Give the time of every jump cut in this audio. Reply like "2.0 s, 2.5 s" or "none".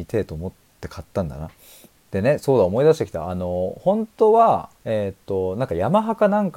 2.0 s, 4.8 s

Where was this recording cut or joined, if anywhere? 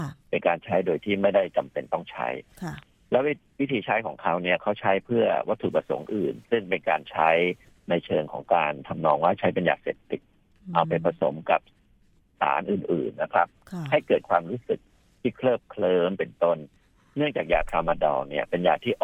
6.4 s

